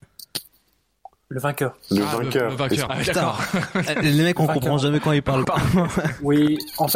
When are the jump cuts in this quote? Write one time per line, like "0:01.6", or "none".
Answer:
0:02.9
0:05.4